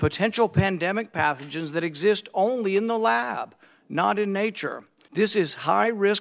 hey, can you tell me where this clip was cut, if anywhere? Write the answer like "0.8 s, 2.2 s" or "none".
5.1 s